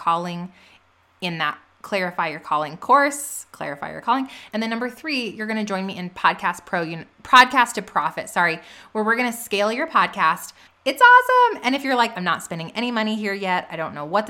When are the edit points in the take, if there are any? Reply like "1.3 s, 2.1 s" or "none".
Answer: 4.5 s, 10.7 s, 12.1 s